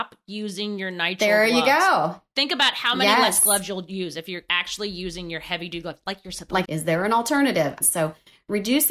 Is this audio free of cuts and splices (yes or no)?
no